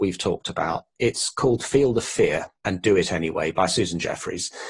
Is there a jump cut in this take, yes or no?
yes